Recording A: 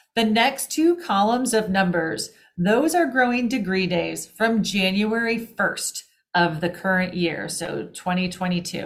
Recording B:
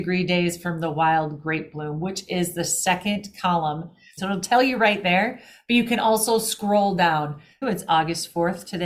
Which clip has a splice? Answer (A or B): B